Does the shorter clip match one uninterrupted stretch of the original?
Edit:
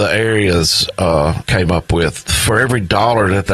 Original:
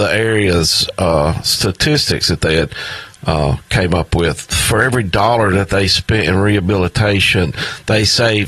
no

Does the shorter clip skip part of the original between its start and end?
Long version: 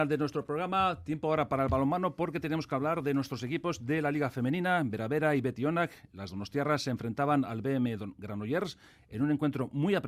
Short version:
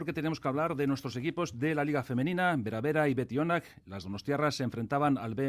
no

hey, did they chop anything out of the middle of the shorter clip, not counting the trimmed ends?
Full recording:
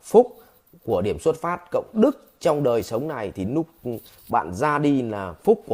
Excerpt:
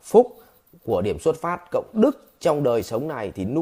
no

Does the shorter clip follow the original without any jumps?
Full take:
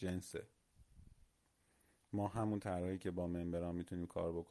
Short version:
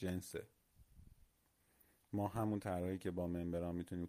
yes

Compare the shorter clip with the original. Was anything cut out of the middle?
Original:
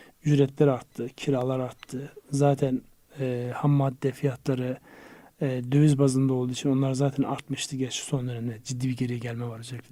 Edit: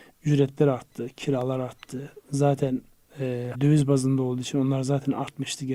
yes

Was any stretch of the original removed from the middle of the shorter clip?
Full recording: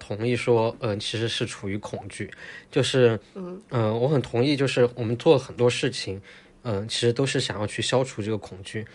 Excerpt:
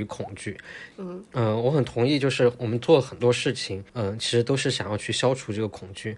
yes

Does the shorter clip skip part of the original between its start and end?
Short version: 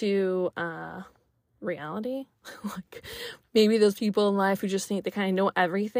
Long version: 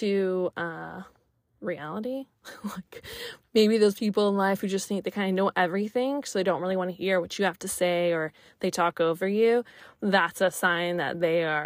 no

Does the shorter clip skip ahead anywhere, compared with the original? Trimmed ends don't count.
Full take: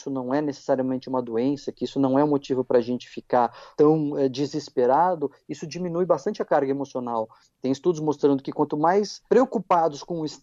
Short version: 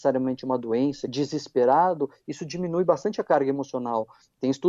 yes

